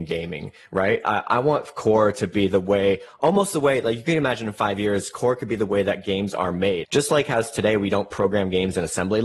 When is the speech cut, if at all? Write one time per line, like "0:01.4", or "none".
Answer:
0:06.8